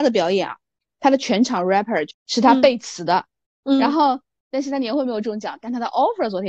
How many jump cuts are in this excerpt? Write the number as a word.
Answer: two